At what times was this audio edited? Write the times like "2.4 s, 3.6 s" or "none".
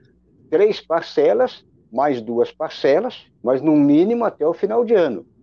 3.4 s